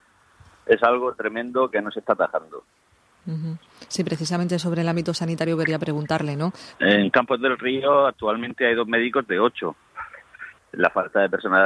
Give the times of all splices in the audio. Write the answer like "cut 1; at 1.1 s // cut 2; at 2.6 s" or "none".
cut 1; at 6.7 s // cut 2; at 10.6 s